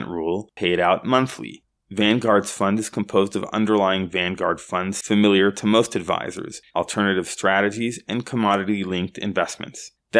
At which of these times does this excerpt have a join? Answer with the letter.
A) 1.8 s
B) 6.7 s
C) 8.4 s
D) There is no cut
B